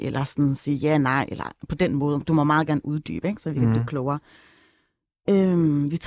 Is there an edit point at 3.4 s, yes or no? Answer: no